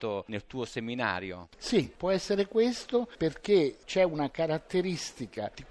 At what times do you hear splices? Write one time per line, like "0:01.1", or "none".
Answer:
none